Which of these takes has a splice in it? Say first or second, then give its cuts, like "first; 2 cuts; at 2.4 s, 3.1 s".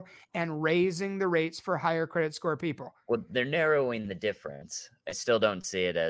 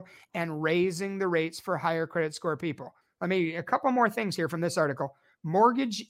second; 1 cut; at 3.0 s